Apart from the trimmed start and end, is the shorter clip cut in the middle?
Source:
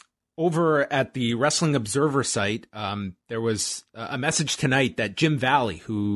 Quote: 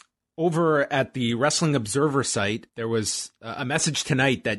yes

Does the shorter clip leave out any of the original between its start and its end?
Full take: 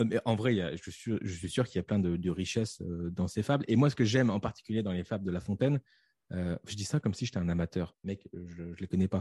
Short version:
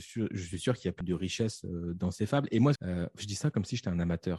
yes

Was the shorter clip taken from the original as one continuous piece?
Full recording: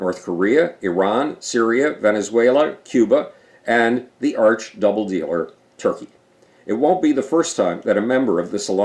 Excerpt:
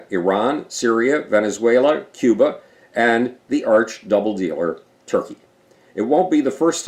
yes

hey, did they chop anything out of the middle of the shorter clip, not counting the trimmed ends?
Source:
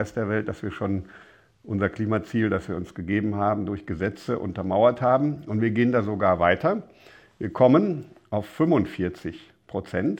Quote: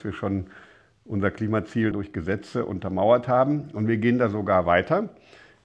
yes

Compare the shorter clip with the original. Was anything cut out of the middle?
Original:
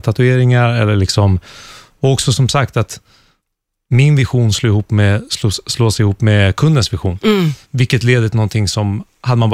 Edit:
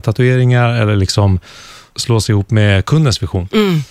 yes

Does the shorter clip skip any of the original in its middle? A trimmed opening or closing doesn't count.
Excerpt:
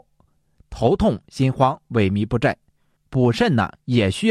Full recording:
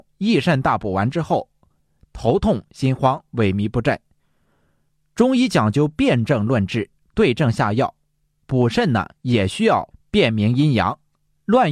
yes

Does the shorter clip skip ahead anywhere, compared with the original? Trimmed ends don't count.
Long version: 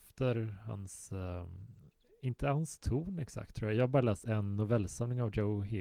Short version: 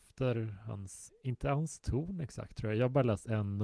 yes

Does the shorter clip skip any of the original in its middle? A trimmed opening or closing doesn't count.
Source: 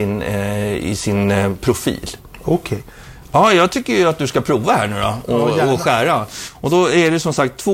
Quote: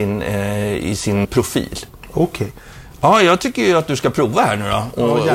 yes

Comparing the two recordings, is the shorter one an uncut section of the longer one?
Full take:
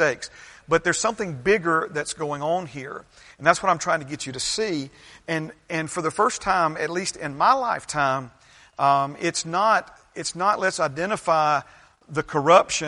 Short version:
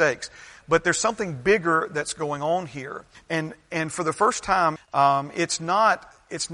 no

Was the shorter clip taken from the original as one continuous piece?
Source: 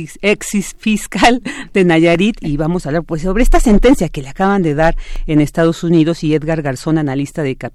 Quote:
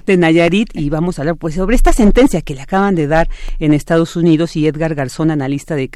yes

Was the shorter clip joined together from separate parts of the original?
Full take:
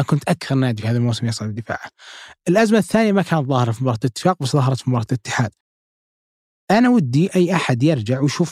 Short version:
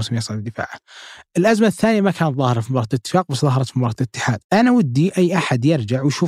yes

